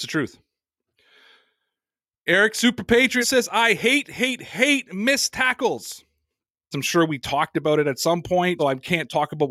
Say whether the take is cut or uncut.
cut